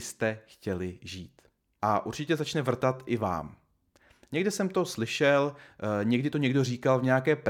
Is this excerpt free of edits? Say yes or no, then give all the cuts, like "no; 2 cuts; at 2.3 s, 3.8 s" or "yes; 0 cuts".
no; 1 cut; at 1.8 s